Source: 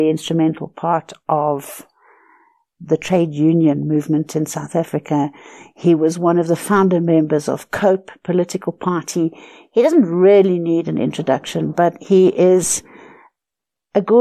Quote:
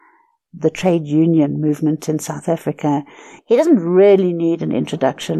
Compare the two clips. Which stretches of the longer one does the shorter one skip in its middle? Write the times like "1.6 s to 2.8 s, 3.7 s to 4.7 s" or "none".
5.7 s to 9.6 s